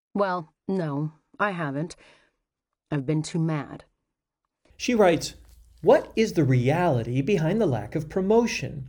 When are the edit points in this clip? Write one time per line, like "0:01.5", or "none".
0:04.7